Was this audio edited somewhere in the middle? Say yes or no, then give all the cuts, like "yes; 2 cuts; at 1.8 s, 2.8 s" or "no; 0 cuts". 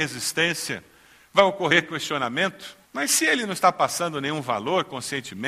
yes; 1 cut; at 2.9 s